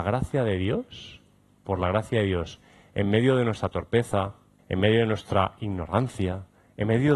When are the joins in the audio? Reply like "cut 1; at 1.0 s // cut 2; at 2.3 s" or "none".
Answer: cut 1; at 4.6 s